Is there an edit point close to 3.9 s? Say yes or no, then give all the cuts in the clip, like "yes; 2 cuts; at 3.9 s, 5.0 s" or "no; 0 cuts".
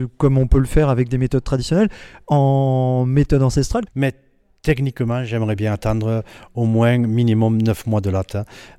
yes; 1 cut; at 3.9 s